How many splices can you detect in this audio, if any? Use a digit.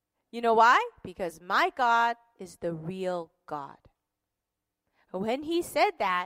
0